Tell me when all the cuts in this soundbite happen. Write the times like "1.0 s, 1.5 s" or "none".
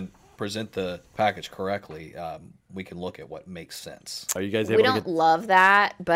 1.1 s, 4.4 s